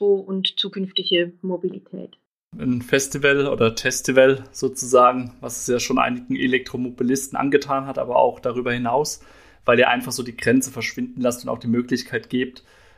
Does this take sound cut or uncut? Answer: uncut